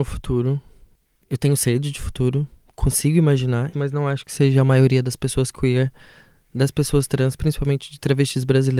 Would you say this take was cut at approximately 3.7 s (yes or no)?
yes